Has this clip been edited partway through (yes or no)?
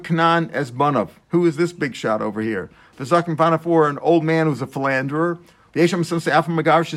yes